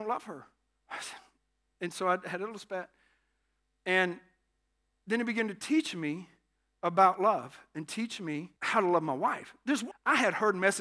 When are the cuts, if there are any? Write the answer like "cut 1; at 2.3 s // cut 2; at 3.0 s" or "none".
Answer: cut 1; at 8.6 s // cut 2; at 9.9 s